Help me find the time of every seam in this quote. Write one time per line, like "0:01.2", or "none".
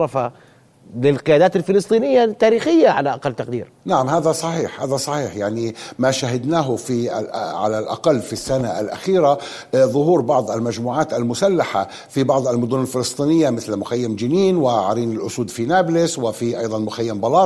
0:03.8